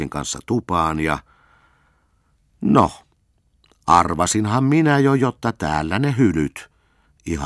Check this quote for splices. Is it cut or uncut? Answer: uncut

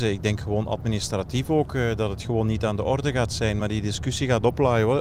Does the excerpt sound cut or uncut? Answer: uncut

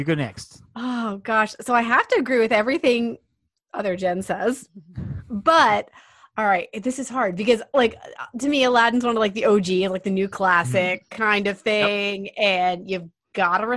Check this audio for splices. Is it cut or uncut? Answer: uncut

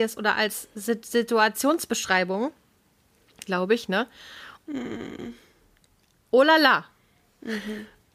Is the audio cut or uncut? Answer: cut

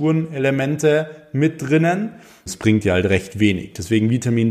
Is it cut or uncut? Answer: cut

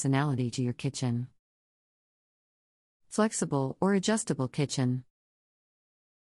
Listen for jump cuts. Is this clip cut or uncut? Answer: uncut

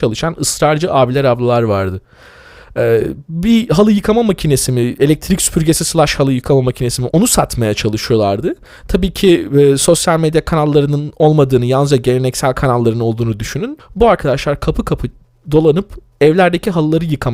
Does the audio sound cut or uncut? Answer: cut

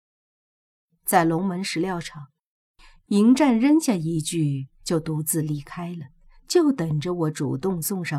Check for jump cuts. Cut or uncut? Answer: uncut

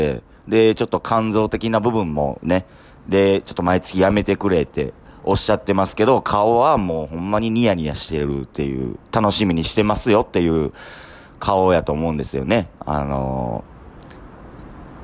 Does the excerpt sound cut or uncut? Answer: uncut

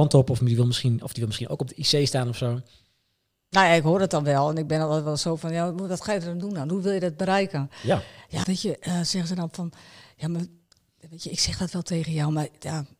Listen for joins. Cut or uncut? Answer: cut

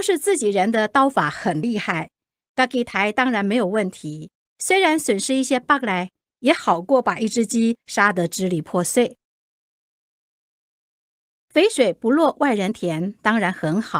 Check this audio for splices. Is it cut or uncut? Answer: cut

